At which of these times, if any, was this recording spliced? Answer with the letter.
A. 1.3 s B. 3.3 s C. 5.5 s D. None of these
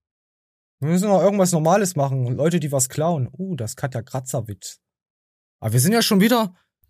D